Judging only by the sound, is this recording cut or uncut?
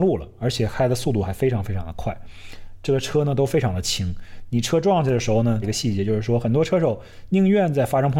cut